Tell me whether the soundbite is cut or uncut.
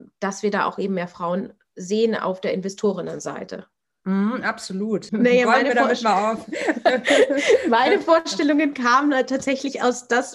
cut